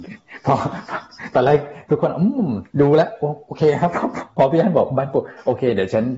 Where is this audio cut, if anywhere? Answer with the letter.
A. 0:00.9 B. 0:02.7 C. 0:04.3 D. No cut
B